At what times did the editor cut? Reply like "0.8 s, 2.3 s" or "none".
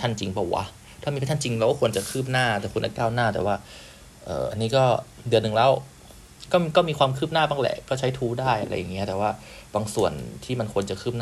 4.5 s